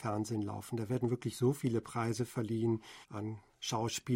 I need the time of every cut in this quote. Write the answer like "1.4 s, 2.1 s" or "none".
3.0 s